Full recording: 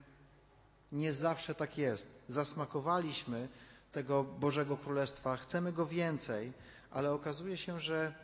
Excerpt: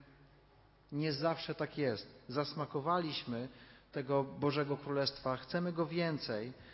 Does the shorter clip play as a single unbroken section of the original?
yes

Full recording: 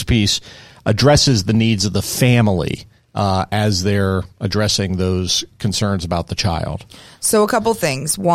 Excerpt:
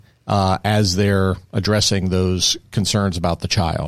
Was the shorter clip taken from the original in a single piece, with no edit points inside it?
yes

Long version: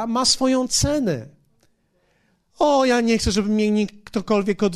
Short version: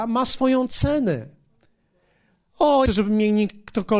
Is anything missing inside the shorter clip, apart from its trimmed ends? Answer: yes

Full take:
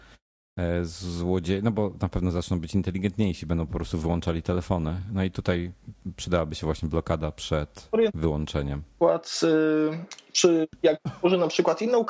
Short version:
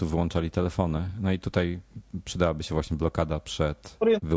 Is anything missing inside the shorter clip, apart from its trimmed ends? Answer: no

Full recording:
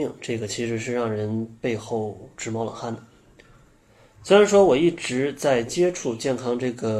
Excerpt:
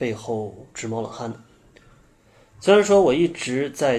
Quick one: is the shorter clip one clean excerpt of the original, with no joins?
yes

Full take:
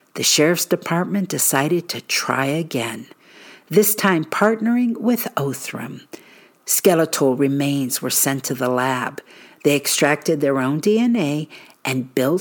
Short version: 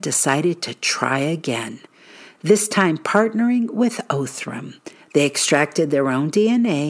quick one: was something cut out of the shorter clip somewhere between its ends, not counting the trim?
yes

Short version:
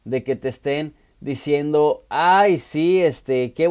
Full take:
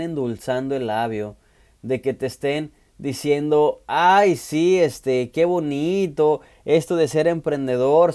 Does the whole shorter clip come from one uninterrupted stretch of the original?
yes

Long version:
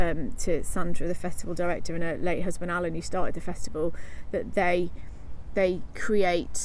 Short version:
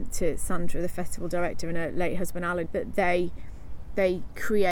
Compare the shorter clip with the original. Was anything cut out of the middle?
yes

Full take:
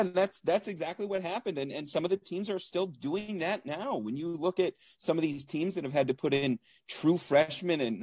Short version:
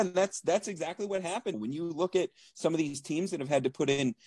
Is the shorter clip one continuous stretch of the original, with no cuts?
no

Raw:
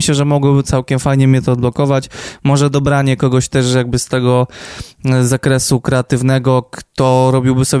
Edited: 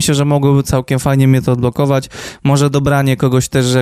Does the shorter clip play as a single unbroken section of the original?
yes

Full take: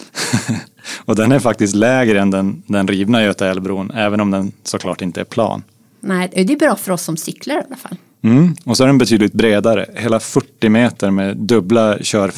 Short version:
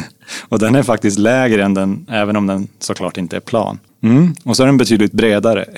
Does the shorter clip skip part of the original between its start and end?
yes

